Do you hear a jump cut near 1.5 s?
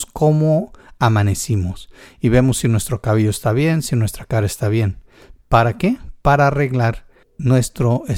no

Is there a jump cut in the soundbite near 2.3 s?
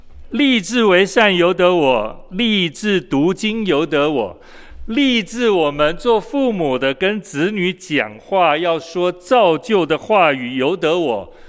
no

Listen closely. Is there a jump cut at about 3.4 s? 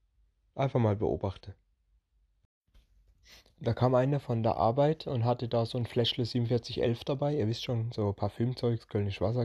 no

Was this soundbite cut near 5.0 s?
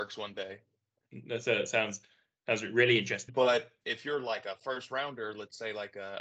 no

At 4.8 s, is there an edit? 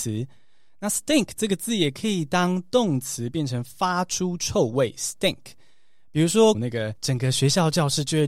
no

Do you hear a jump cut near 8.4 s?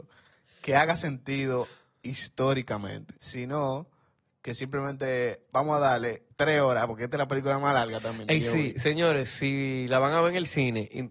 no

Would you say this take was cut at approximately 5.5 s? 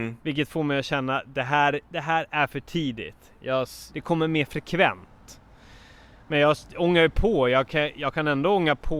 no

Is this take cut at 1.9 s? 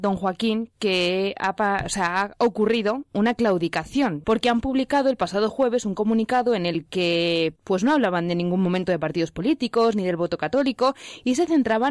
no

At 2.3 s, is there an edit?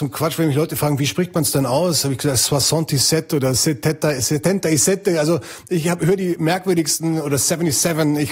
no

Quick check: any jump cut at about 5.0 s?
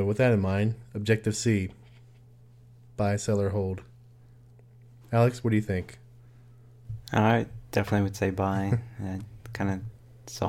yes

